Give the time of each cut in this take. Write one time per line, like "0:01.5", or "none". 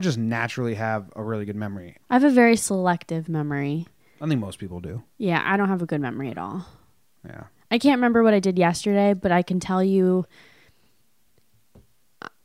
0:02.0